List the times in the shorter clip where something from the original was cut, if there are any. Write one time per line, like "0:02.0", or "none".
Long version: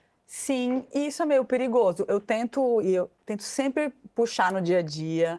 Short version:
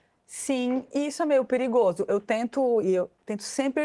none

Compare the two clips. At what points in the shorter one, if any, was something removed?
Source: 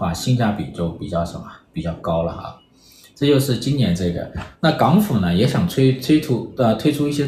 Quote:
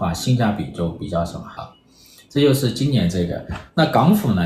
0:01.6

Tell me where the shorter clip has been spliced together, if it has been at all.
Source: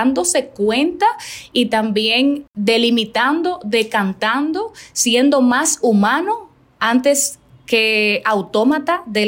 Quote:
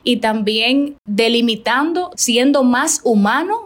0:02.1

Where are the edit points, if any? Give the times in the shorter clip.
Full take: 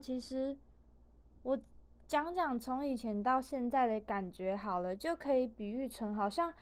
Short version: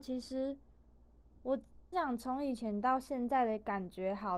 0:01.9

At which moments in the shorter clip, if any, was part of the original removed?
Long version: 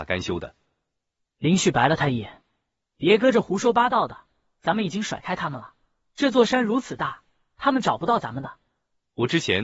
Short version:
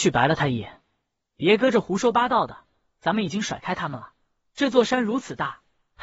none

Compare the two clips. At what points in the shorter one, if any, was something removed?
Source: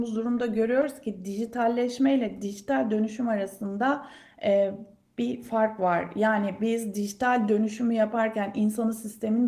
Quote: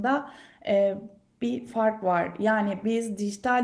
none

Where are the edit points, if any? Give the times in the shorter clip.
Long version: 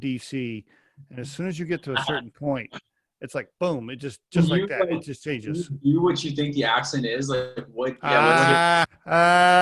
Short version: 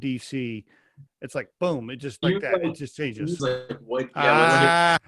0:01.1
0:02.2
0:03.4

